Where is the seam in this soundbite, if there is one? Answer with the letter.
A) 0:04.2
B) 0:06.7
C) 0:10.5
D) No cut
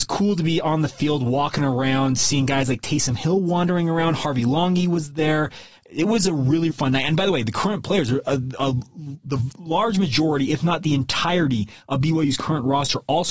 B